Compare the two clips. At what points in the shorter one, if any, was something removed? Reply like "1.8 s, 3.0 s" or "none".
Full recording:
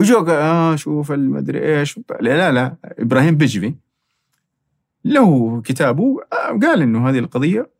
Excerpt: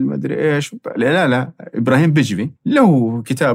2.6 s